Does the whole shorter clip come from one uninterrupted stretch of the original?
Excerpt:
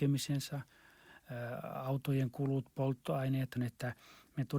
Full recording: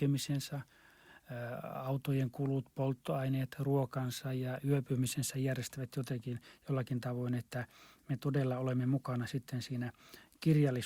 no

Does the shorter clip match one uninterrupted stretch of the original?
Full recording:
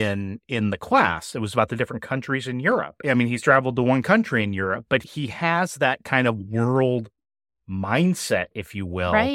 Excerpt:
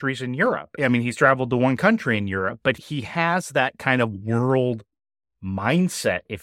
yes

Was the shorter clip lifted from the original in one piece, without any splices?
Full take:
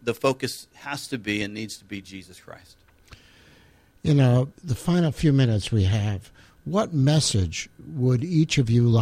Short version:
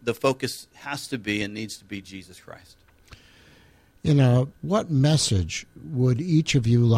no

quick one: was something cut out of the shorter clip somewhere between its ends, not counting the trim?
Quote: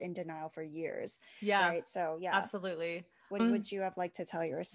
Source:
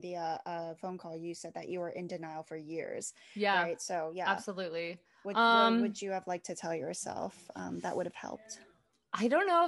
yes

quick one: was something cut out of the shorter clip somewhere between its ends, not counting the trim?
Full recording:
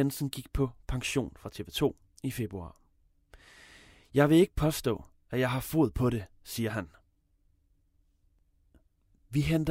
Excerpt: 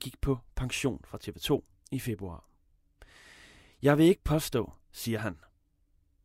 yes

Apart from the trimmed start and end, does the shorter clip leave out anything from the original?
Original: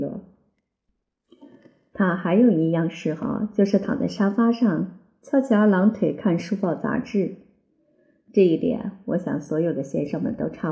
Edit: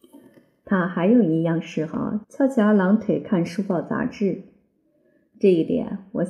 yes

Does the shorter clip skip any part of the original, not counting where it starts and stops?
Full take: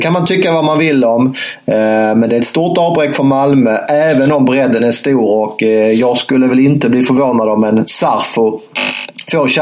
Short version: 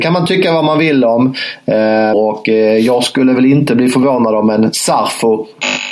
yes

